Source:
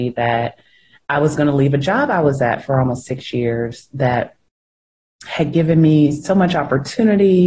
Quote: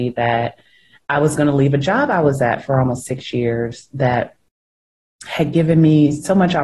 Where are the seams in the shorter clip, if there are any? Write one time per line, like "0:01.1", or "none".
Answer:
none